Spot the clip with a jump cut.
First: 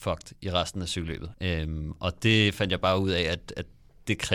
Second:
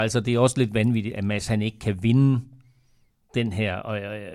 first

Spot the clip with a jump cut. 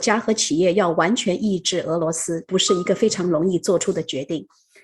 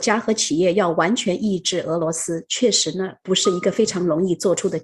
first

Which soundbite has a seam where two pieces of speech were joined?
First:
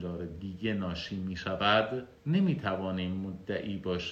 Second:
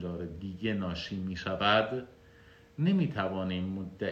first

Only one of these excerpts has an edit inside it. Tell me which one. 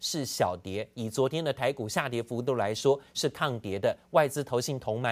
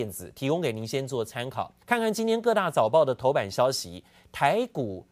second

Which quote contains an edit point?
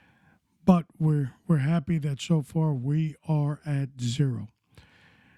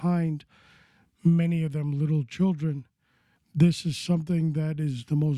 second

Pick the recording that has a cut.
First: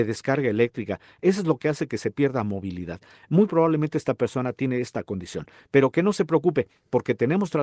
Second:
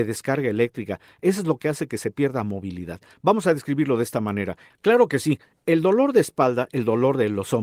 second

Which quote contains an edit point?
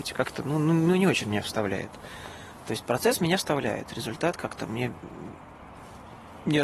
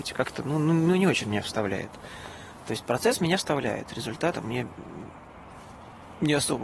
second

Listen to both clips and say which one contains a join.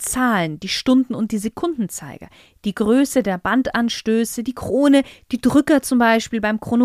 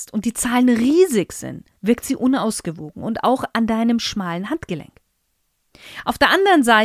second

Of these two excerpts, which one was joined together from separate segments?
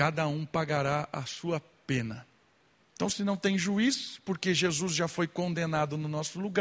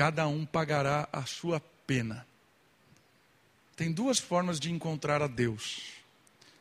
first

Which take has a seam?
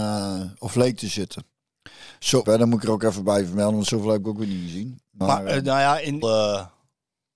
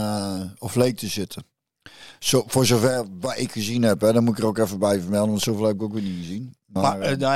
first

